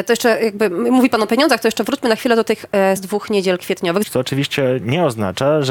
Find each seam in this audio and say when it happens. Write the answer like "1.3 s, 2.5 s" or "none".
3.0 s, 4.0 s

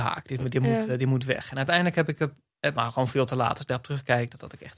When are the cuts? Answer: 2.7 s

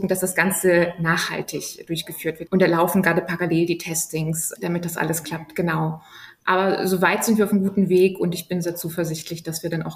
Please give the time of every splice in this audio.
2.5 s, 4.5 s

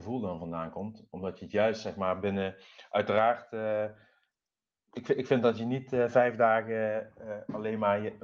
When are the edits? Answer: 4.9 s

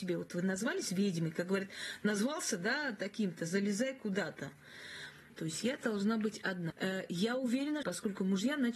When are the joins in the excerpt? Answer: 5.3 s, 6.7 s, 7.8 s

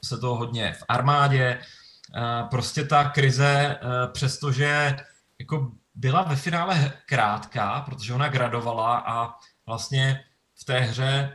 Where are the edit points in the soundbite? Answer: none

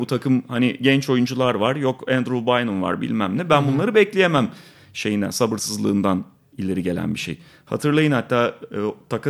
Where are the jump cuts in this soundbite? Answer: none

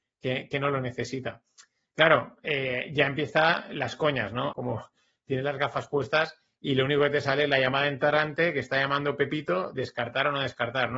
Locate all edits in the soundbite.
1.9 s, 4.5 s

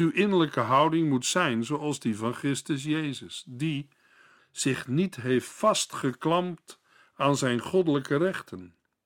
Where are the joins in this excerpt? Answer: 4.4 s

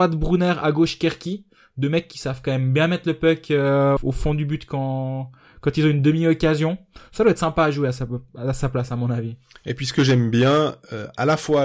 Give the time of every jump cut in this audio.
4.0 s

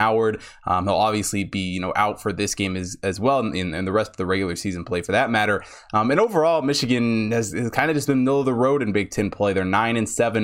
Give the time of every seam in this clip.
none

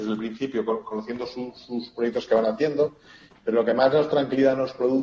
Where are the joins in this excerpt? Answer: 3.3 s

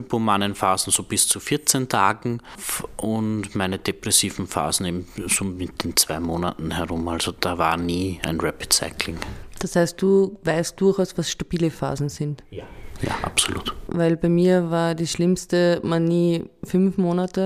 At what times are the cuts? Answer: none

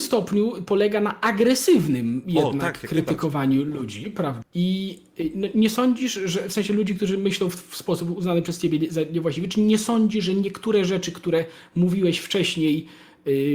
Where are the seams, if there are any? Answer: 4.4 s

